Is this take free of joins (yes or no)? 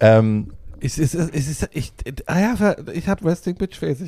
no